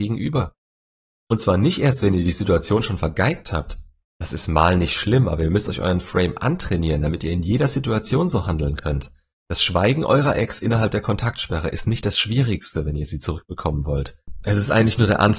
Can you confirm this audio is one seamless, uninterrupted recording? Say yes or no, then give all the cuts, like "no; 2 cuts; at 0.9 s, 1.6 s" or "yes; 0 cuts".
yes; 0 cuts